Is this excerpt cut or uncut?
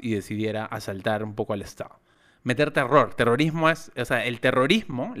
uncut